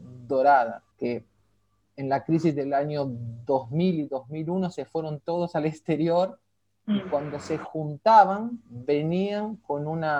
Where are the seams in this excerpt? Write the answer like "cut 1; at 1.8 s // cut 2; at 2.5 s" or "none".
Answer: cut 1; at 0.9 s